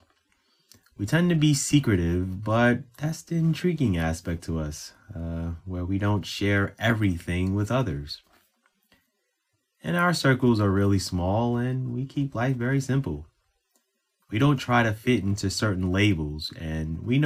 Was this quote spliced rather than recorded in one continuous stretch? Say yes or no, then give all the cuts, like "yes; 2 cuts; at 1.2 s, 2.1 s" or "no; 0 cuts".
yes; 1 cut; at 14.2 s